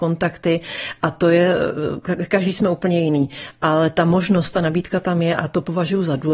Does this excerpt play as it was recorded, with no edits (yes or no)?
yes